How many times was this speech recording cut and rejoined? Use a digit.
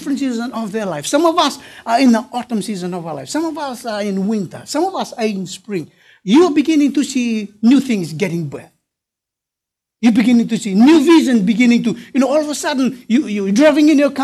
0